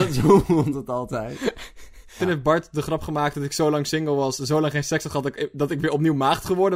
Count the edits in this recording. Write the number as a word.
one